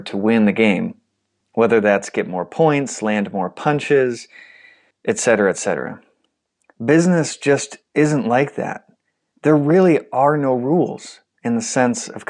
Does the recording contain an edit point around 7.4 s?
no; 0 cuts

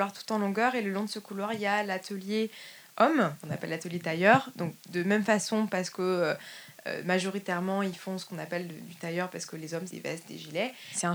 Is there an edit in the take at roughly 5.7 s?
no; 2 cuts; at 3.4 s, 9.9 s

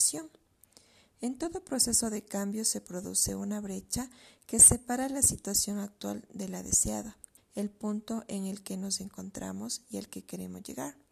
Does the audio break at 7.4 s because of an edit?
yes; 1 cut; at 7.4 s

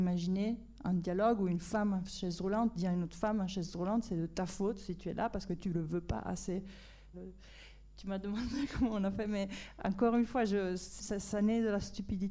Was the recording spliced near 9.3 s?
no; 2 cuts; at 7.1 s, 11.0 s

